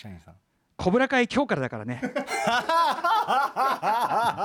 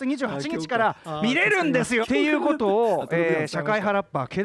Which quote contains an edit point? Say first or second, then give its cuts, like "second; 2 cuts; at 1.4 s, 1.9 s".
second; 1 cut; at 2.0 s